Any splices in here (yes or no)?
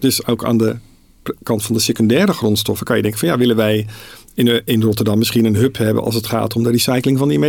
no